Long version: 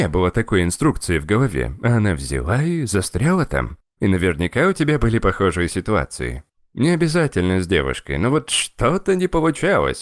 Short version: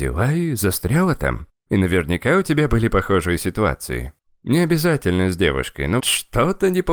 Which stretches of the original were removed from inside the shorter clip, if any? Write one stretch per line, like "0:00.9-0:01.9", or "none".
0:08.3-0:08.5